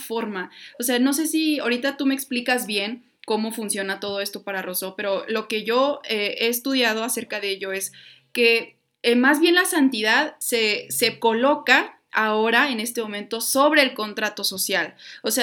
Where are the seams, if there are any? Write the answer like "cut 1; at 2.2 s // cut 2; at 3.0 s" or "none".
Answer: none

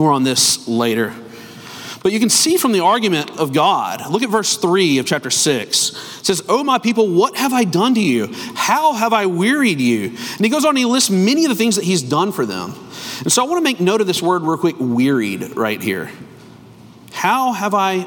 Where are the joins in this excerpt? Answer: none

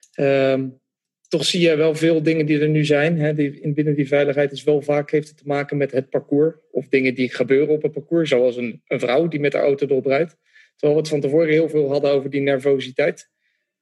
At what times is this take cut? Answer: none

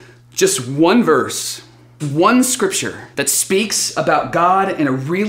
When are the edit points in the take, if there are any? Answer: cut 1; at 2.0 s // cut 2; at 3.1 s

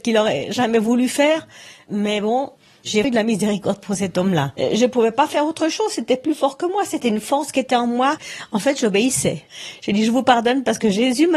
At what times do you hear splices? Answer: cut 1; at 3.0 s

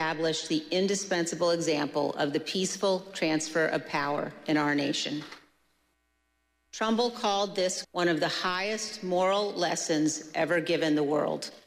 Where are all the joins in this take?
cut 1; at 6.7 s // cut 2; at 7.8 s

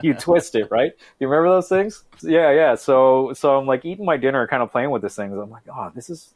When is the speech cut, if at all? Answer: cut 1; at 2.2 s

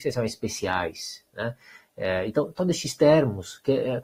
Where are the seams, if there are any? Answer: none

